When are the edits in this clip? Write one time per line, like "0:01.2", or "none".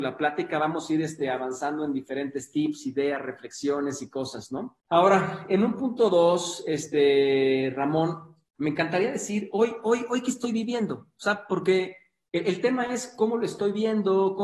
0:04.8